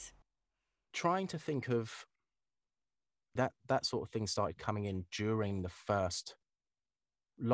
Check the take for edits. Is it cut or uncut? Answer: cut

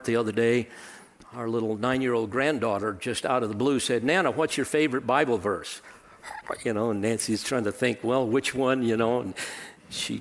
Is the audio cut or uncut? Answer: uncut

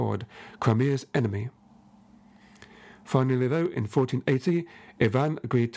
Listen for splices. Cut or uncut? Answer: uncut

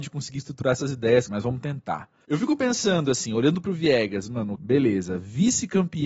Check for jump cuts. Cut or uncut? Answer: cut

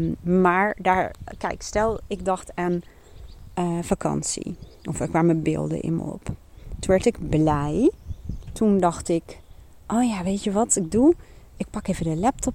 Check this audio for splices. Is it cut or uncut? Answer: uncut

